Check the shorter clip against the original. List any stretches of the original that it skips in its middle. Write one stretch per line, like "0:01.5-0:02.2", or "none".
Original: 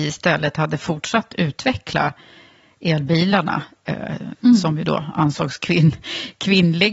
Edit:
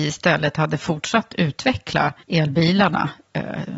0:02.2-0:02.7